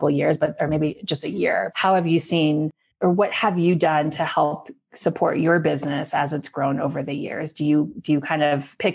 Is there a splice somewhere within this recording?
yes; 1 cut; at 1.7 s

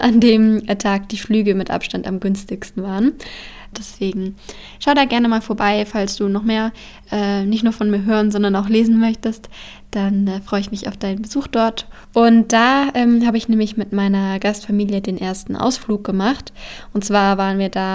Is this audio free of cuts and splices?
no; 2 cuts; at 3.7 s, 12.0 s

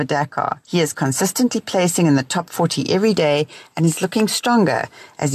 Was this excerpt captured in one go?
yes; 0 cuts

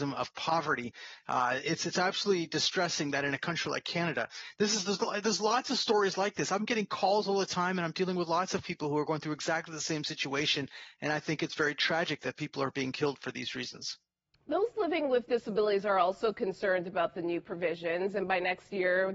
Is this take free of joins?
yes; 0 cuts

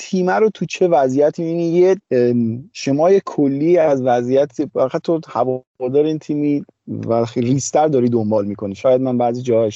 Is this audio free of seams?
yes; 0 cuts

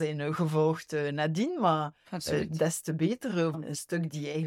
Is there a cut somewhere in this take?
yes; 1 cut; at 3.5 s

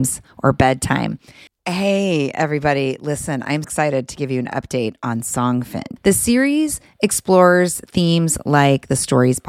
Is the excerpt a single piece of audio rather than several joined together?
no; 3 cuts; at 1.5 s, 3.6 s, 6.0 s

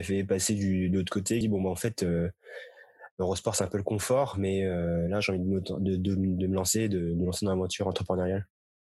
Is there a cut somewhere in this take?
yes; 1 cut; at 1.4 s

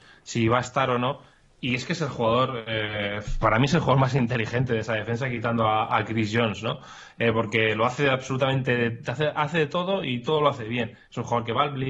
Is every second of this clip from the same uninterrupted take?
yes; 0 cuts

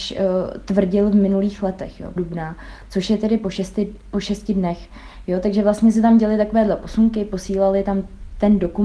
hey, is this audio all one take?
no; 1 cut; at 2.2 s

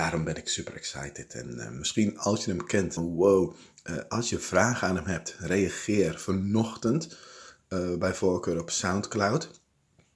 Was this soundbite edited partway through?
yes; 1 cut; at 3.0 s

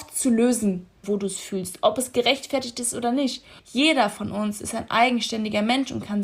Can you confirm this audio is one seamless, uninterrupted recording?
no; 2 cuts; at 1.0 s, 3.6 s

